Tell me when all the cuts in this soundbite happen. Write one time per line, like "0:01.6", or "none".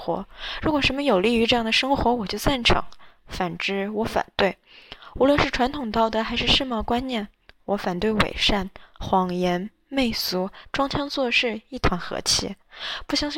0:10.6

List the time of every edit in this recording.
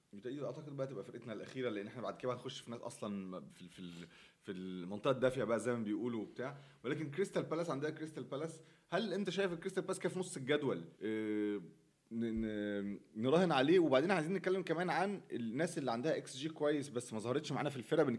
0:03.5
0:10.9

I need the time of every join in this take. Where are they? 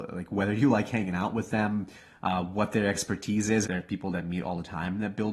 0:03.6

